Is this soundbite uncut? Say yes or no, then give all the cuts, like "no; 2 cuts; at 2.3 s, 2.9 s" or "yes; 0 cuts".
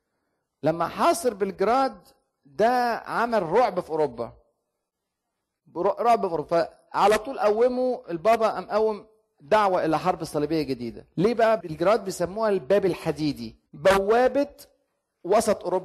no; 2 cuts; at 11.6 s, 13.7 s